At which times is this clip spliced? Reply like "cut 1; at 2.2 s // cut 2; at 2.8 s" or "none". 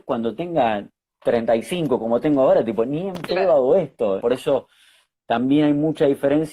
cut 1; at 4.2 s